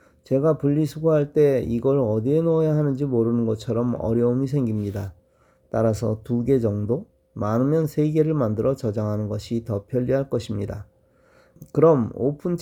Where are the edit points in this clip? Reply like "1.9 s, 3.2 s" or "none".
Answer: none